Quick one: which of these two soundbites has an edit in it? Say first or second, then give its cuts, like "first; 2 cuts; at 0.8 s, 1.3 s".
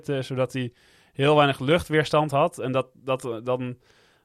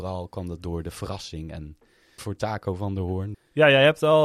second; 2 cuts; at 2.2 s, 3.3 s